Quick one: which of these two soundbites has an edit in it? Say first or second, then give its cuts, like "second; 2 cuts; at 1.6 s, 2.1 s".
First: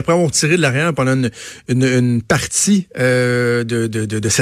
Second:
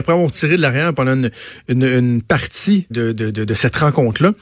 second; 1 cut; at 2.9 s